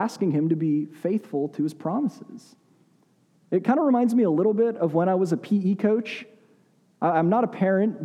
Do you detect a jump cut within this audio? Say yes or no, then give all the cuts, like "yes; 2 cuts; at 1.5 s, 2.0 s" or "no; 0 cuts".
no; 0 cuts